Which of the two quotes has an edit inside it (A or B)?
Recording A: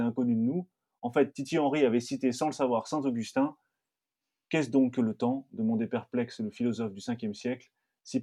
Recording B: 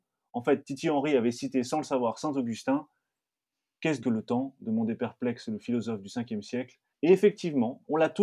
B